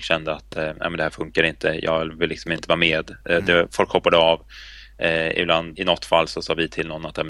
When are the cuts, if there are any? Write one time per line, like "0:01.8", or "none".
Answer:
0:05.7